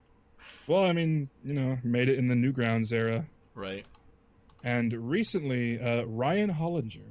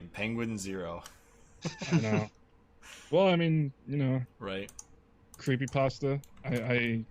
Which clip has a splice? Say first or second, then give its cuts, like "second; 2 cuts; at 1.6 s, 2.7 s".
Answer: second; 2 cuts; at 4.3 s, 5.4 s